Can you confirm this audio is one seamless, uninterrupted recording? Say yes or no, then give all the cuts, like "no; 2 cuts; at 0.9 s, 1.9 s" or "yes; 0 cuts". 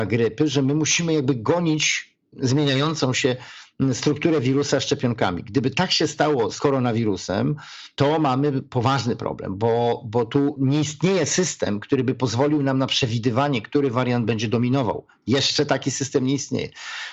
yes; 0 cuts